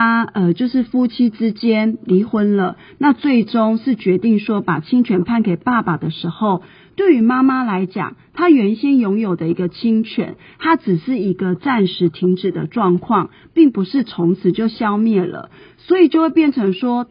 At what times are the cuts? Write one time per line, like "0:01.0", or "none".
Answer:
none